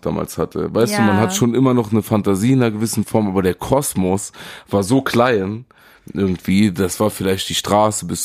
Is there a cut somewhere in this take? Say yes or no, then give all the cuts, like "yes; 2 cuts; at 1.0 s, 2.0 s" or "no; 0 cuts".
no; 0 cuts